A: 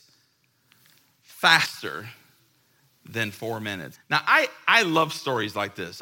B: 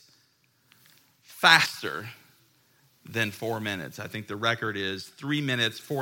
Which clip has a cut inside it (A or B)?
A